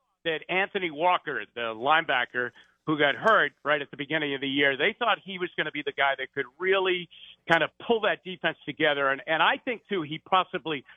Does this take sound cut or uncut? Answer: uncut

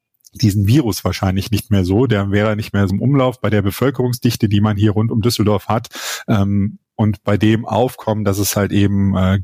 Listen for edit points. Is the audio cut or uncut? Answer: cut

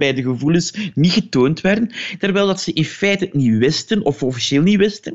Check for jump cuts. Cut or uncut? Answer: cut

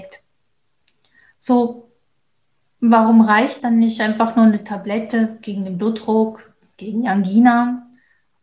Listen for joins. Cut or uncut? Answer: cut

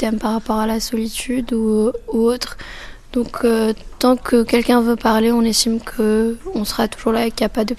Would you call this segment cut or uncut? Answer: uncut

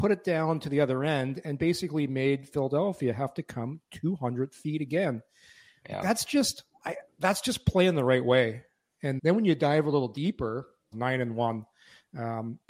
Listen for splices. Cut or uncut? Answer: cut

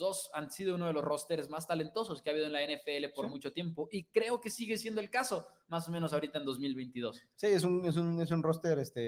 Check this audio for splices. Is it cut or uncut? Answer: uncut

